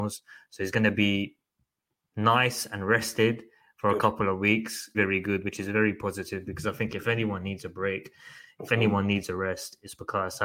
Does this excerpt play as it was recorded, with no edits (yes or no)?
no